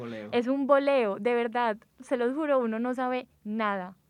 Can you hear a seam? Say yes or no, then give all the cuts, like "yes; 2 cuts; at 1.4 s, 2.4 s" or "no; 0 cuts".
no; 0 cuts